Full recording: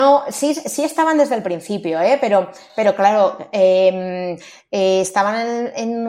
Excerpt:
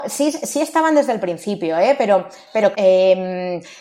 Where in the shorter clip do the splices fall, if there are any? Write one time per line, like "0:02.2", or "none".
0:02.7